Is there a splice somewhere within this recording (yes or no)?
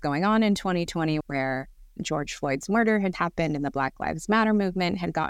yes